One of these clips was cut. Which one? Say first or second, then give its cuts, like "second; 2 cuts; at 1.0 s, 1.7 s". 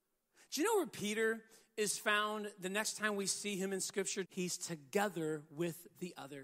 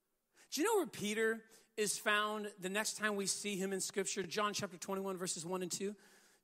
first; 1 cut; at 4.2 s